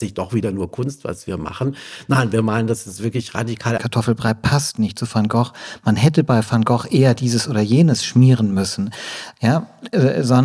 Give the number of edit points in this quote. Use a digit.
1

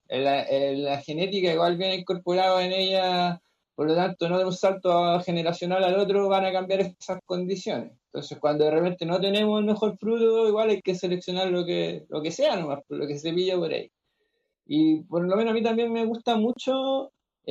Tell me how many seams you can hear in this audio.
0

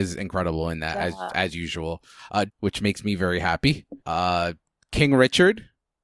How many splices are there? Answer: 2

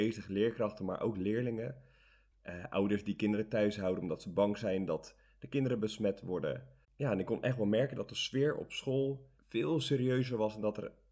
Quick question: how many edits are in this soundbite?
3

